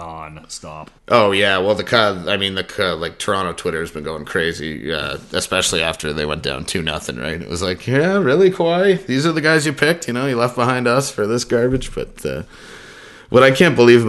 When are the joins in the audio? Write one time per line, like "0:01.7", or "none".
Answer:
0:01.0